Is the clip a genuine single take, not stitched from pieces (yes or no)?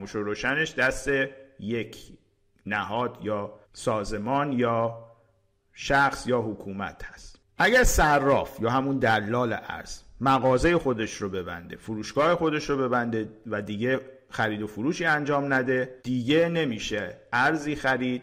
no